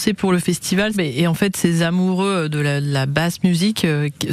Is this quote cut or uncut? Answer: cut